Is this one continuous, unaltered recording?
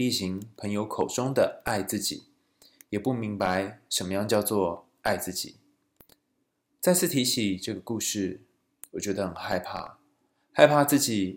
yes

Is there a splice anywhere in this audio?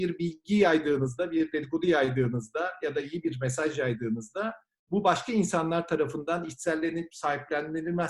no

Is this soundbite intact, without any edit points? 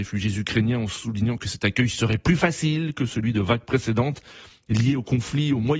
yes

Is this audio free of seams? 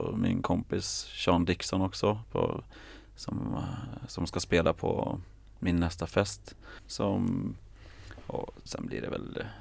no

